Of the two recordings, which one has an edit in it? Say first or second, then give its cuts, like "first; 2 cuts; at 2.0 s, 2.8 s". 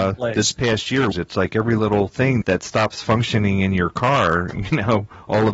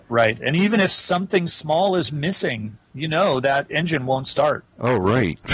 first; 2 cuts; at 1.1 s, 2.4 s